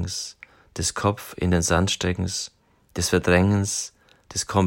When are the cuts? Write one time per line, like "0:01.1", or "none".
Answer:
none